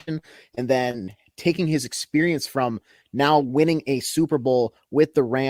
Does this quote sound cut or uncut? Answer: uncut